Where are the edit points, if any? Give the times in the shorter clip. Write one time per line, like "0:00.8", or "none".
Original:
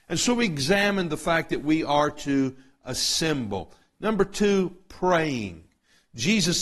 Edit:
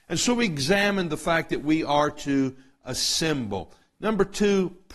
none